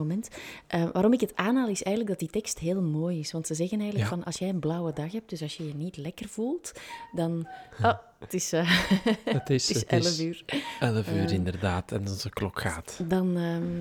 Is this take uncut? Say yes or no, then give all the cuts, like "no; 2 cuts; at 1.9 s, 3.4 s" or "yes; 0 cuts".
yes; 0 cuts